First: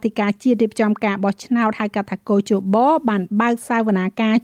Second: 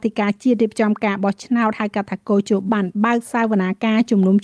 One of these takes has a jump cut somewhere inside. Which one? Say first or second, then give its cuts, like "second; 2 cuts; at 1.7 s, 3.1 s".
second; 1 cut; at 2.7 s